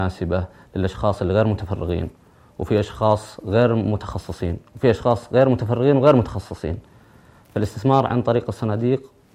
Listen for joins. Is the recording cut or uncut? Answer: uncut